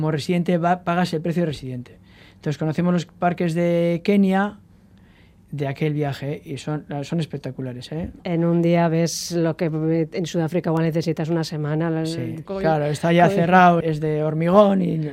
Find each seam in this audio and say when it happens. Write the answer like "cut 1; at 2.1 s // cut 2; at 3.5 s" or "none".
cut 1; at 8.2 s // cut 2; at 12.5 s // cut 3; at 13.8 s